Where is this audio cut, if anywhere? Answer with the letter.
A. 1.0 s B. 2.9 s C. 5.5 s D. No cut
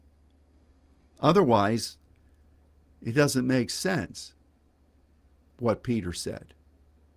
D